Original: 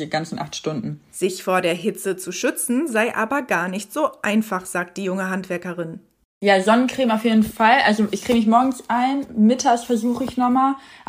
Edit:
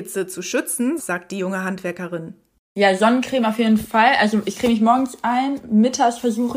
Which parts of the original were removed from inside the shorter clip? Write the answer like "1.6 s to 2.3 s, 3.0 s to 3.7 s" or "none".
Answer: 2.9 s to 4.6 s